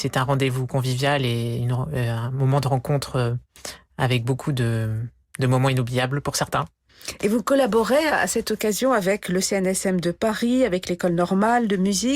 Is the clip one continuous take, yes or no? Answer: yes